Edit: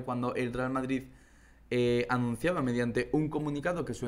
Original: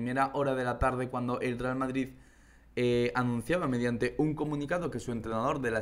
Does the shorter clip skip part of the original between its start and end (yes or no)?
no